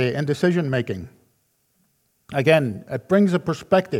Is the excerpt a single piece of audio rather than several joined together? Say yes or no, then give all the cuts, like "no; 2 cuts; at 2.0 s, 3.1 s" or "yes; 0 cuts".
yes; 0 cuts